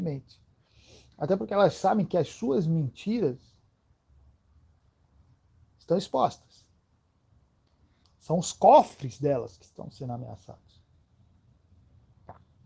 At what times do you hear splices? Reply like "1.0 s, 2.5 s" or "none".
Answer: 8.0 s